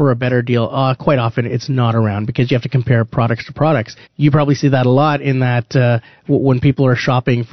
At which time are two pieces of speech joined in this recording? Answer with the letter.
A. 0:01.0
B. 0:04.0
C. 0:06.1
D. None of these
B